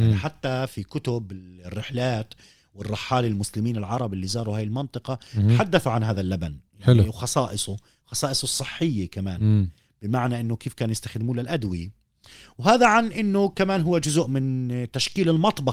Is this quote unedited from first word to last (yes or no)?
yes